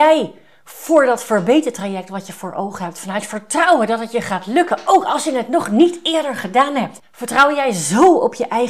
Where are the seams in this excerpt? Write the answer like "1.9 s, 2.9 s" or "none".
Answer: 7.0 s